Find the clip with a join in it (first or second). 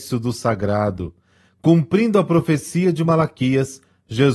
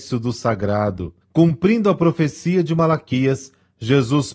second